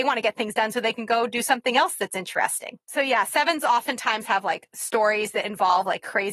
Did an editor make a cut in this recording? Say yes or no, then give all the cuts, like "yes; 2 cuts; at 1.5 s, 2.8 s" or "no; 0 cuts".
yes; 1 cut; at 2.8 s